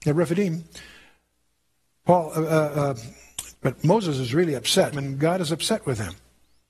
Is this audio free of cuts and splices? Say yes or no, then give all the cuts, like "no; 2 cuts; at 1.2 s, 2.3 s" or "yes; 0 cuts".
no; 2 cuts; at 3.5 s, 4.9 s